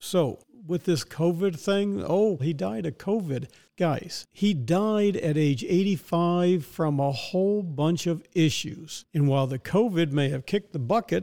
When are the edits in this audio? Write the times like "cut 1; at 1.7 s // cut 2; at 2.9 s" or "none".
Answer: cut 1; at 2.4 s